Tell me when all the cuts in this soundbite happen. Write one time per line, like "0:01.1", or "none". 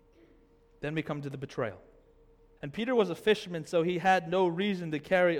0:02.6